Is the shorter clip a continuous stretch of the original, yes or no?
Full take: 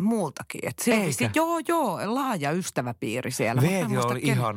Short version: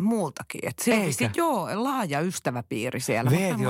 no